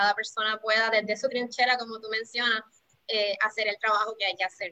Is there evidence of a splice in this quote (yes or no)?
no